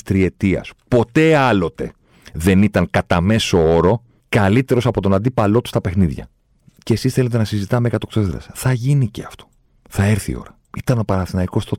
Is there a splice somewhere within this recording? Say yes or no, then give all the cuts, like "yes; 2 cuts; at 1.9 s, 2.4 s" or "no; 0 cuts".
no; 0 cuts